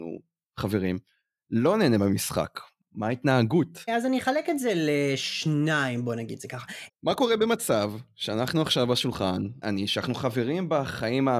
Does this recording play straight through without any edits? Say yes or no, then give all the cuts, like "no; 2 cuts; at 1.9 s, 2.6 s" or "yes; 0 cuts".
no; 3 cuts; at 3.9 s, 6.9 s, 9.6 s